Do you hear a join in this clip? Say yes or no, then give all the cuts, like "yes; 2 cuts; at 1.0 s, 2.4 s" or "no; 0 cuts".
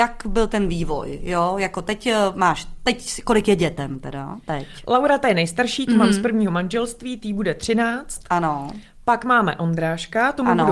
no; 0 cuts